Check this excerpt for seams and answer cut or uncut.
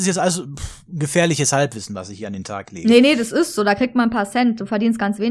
uncut